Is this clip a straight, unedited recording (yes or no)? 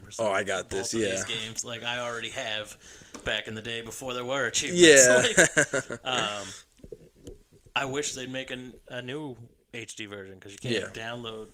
yes